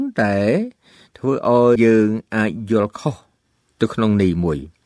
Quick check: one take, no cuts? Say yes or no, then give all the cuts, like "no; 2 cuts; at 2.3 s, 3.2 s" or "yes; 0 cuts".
no; 1 cut; at 1.8 s